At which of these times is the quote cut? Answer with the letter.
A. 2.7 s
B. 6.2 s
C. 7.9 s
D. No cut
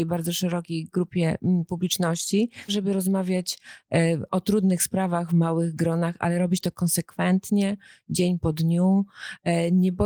A